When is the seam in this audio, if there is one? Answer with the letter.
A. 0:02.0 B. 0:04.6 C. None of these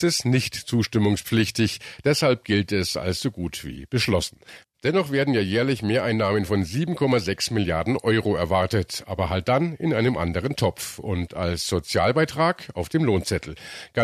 B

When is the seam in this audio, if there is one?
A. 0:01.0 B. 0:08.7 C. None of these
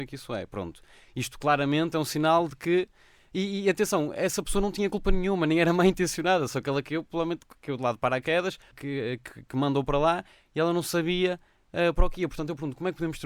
B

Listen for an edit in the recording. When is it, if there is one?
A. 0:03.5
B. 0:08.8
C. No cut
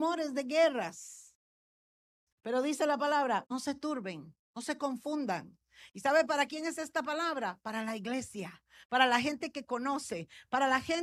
A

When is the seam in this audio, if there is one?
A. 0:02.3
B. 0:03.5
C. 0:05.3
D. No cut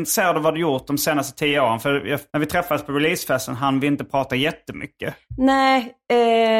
A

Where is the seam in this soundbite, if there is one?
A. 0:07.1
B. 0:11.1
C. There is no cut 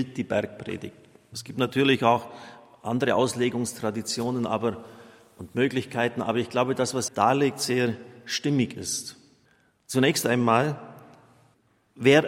A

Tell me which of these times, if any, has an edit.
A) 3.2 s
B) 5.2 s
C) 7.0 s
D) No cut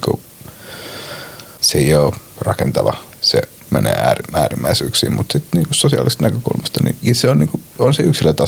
C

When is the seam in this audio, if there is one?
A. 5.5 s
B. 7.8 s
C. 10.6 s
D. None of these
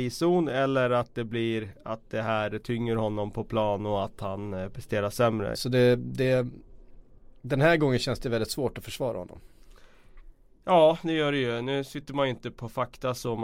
A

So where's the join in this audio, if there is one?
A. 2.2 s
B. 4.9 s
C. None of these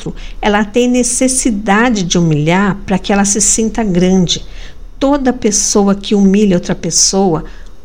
C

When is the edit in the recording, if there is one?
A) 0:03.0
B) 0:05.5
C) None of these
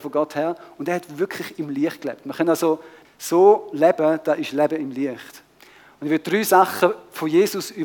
A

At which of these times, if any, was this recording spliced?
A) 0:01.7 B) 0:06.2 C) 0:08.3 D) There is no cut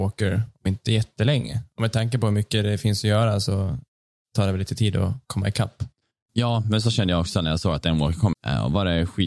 C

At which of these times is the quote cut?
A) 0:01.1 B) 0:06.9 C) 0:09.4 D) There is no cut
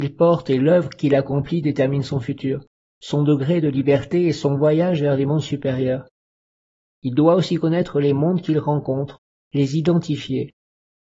C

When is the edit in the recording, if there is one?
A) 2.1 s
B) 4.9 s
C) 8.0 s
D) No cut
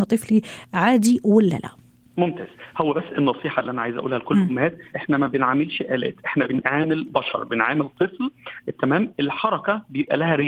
B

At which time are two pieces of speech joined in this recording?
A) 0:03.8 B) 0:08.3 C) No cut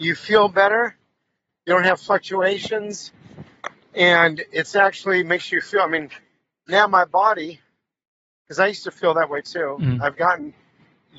C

